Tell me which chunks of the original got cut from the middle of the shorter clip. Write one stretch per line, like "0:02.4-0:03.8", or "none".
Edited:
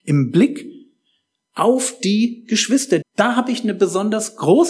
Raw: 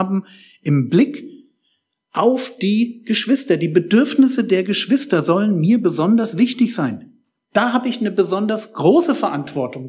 0:03.6-0:07.4